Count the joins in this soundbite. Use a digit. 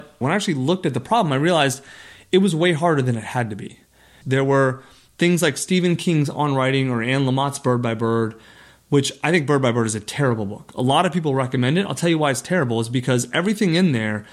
1